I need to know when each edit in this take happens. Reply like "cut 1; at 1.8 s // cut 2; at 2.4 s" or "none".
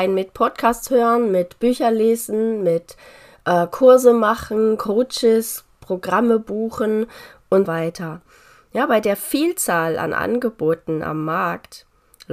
cut 1; at 7.7 s